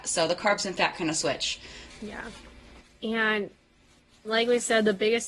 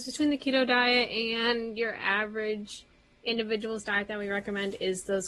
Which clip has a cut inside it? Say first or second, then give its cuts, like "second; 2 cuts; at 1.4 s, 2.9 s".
first; 1 cut; at 1.9 s